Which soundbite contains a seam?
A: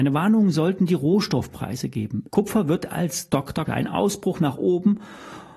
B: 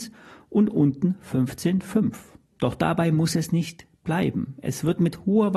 A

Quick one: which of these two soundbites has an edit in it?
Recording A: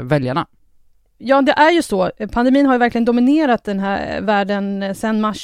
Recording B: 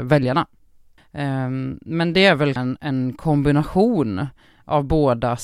B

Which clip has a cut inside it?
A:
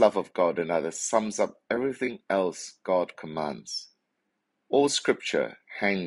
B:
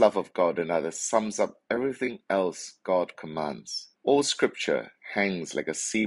B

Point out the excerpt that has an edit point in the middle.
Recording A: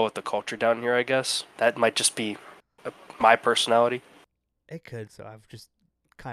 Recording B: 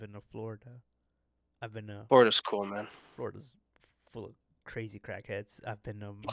A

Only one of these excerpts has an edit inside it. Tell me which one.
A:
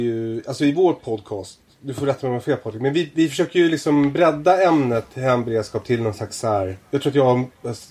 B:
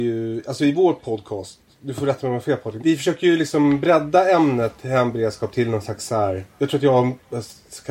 B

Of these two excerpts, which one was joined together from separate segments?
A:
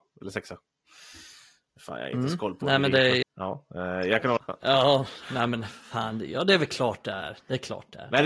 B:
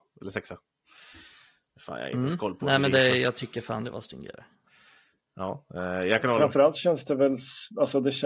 A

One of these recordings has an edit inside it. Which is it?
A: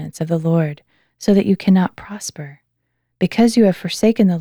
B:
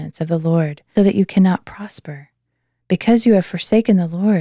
B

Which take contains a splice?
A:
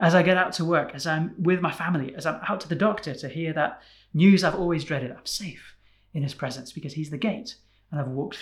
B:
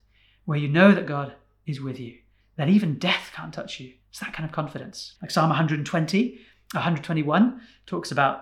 B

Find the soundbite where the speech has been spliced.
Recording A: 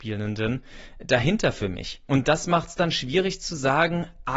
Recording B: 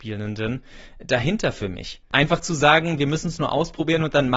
B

